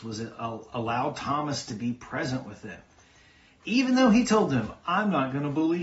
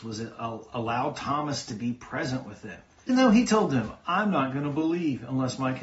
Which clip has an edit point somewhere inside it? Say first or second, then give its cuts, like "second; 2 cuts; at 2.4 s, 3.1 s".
second; 1 cut; at 3.1 s